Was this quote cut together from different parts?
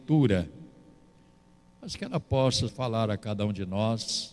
yes; 1 cut; at 2.7 s

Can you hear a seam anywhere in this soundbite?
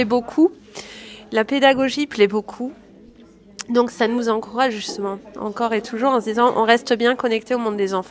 no; 0 cuts

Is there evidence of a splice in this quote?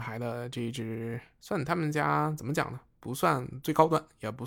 no; 0 cuts

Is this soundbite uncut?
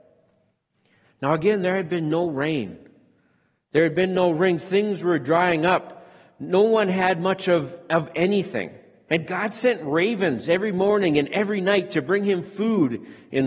no; 1 cut; at 9.1 s

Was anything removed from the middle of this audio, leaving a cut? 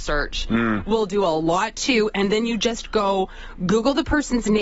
no; 0 cuts

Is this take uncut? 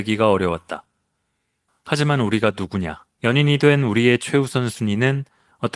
no; 2 cuts; at 1.7 s, 3.2 s

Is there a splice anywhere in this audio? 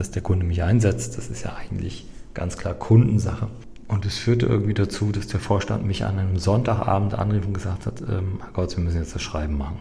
no; 0 cuts

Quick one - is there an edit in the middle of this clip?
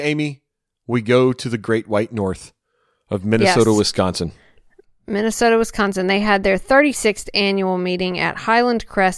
no; 0 cuts

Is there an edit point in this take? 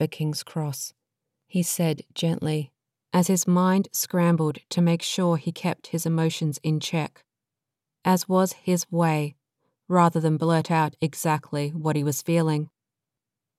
no; 0 cuts

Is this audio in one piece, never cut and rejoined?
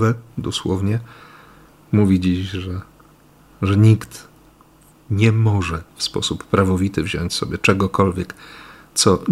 yes; 0 cuts

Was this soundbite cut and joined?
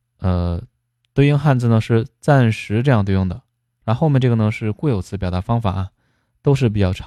no; 0 cuts

